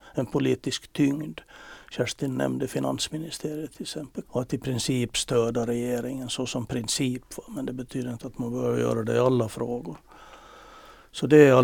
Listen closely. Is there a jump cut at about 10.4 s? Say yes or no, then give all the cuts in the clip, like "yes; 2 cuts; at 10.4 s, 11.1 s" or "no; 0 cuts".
no; 1 cut; at 4.2 s